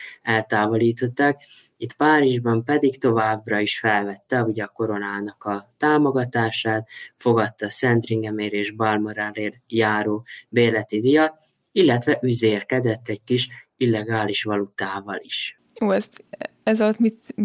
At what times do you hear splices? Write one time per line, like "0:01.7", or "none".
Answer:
0:01.8